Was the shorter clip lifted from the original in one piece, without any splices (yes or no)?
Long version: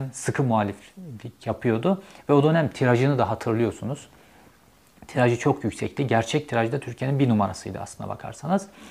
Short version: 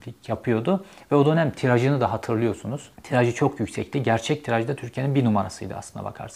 no